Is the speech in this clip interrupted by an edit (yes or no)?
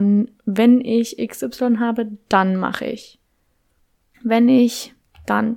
yes